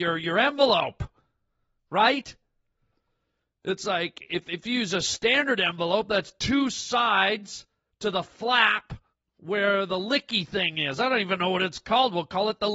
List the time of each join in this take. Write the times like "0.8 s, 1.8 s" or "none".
none